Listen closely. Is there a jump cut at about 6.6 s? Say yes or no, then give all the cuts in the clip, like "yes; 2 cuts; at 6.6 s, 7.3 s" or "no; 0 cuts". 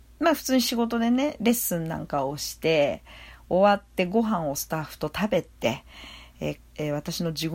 yes; 1 cut; at 6.6 s